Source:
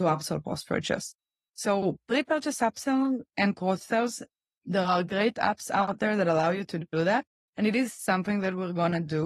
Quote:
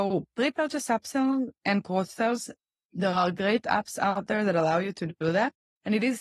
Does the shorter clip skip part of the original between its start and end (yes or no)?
no